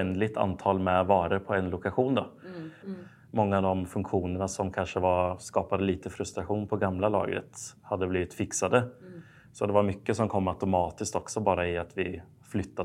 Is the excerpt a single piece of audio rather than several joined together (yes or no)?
no